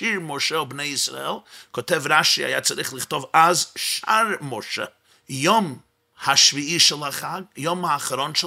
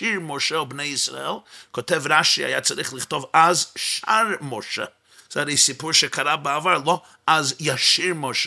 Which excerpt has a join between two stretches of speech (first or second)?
first